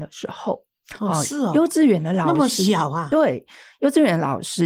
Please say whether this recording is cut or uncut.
uncut